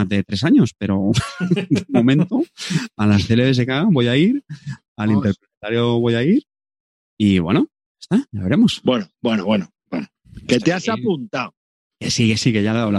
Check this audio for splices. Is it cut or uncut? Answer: uncut